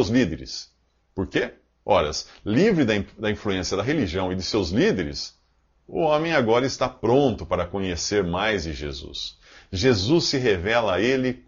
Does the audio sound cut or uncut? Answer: cut